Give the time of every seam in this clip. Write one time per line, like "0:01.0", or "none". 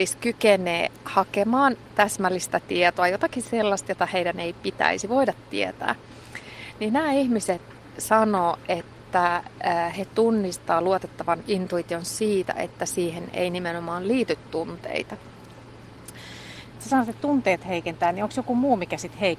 0:16.7